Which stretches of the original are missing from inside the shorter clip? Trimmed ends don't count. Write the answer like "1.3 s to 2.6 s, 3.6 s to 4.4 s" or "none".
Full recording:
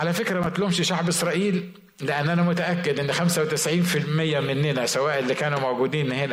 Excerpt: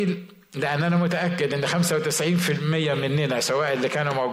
none